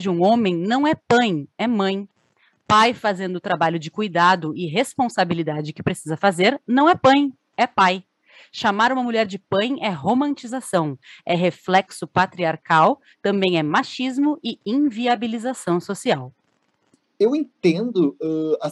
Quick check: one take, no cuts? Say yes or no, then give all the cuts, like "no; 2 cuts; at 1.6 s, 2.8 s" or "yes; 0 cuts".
yes; 0 cuts